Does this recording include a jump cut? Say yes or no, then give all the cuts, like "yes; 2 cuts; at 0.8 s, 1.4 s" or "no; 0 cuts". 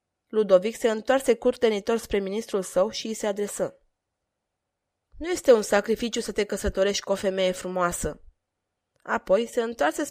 no; 0 cuts